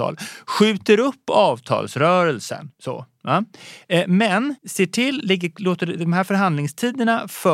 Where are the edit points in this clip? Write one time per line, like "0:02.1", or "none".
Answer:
0:02.7
0:04.6